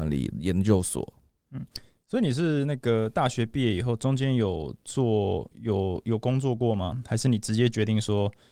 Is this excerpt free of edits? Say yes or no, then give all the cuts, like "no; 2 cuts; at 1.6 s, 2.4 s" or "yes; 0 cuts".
yes; 0 cuts